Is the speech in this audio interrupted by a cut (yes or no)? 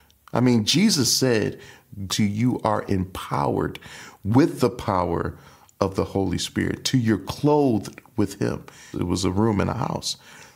yes